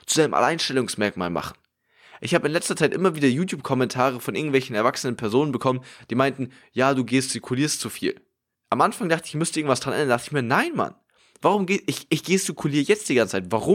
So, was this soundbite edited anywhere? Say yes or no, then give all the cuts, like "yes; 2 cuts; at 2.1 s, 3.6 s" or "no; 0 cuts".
no; 0 cuts